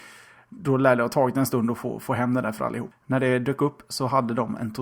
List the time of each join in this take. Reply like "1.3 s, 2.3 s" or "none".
2.9 s